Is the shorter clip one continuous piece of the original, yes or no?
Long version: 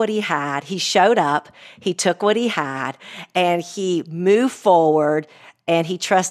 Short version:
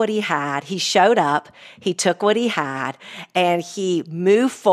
yes